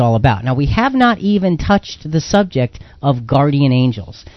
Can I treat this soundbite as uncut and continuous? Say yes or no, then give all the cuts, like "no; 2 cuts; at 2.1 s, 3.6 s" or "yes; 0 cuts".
yes; 0 cuts